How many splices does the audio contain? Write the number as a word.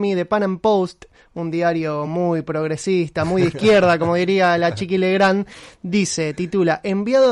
zero